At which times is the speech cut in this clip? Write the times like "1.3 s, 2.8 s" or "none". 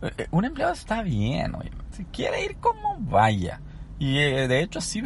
1.9 s